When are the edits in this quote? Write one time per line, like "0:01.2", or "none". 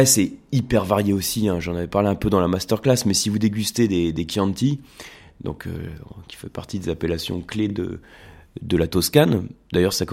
none